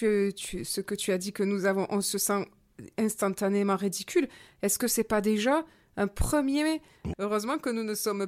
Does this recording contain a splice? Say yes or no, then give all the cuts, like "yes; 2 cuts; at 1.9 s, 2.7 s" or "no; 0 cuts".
yes; 1 cut; at 7.1 s